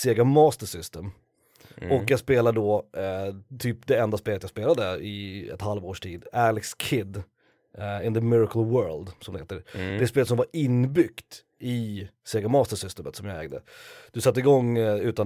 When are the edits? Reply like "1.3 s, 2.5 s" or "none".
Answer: none